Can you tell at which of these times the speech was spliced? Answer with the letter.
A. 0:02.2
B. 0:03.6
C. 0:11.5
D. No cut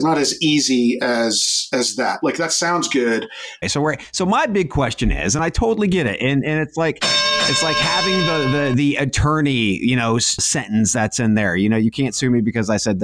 B